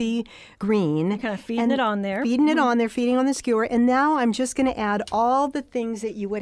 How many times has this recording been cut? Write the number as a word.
zero